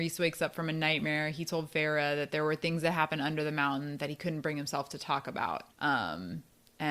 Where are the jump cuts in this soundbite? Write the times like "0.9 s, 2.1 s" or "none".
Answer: 5.7 s